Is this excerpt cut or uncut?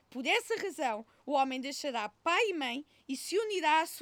uncut